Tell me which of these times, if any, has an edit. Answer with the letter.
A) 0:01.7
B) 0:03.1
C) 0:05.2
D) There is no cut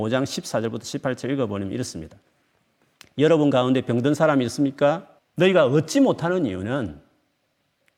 C